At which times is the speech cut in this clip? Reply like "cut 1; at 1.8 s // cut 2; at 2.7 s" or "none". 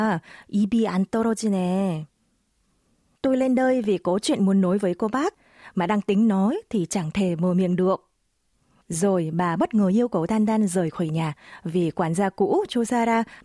none